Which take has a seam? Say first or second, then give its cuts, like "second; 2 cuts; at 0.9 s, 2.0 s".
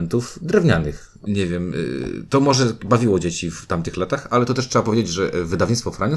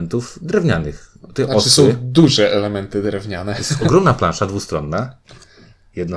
first; 1 cut; at 1.3 s